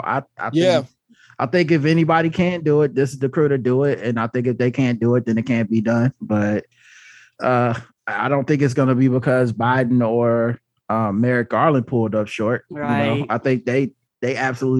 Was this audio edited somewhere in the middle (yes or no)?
no